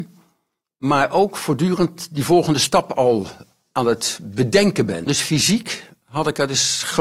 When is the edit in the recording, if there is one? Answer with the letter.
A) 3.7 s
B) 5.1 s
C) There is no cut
B